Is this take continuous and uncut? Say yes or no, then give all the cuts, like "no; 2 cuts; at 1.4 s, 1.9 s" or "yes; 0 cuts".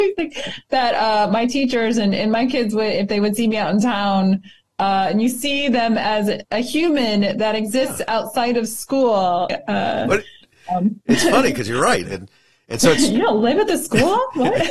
no; 2 cuts; at 9.5 s, 12.0 s